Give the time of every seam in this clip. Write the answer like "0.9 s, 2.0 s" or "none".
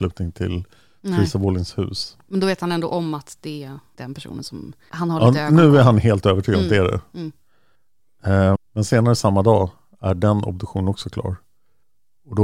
8.6 s